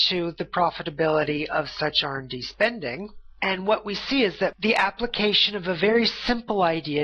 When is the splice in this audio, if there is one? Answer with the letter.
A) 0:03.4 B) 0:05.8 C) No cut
A